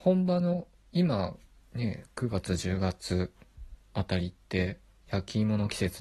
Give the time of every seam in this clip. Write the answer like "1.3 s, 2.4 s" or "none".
none